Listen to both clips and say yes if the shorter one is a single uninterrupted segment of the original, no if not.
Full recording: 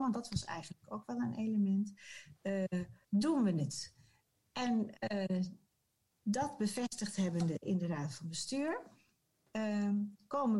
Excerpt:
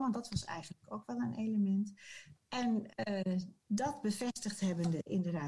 no